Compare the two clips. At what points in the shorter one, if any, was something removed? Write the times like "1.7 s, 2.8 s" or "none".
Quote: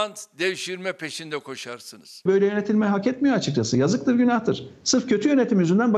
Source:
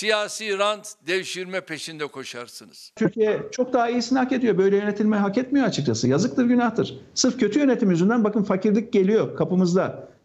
2.3 s